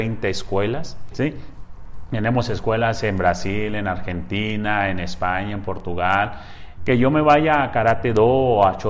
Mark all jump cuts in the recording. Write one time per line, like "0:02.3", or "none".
0:01.1
0:06.8